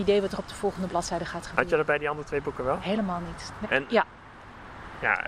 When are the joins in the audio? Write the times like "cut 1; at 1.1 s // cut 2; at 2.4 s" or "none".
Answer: cut 1; at 3.6 s